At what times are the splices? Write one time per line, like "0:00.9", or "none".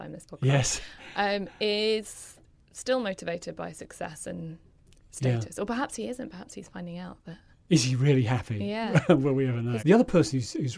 0:09.8